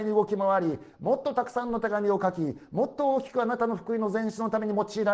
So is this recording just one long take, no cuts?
yes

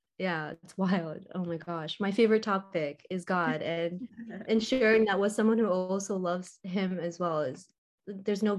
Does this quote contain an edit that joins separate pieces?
no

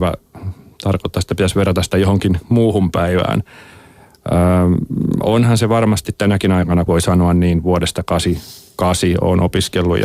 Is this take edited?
yes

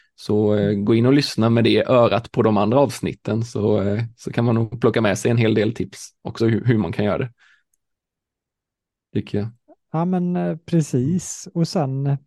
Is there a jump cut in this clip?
no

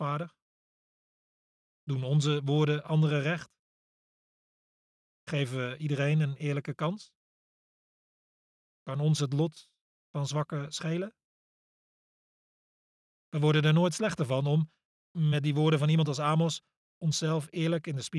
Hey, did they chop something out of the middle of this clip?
no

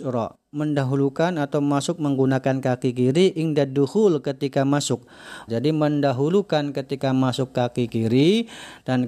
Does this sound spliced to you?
yes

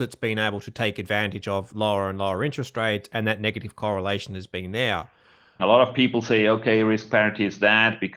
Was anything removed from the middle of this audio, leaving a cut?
yes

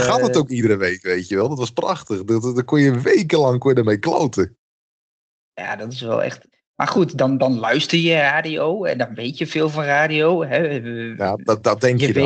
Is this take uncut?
yes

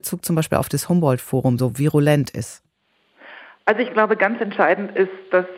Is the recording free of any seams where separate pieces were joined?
yes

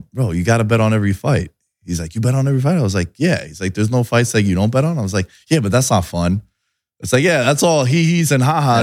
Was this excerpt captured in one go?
yes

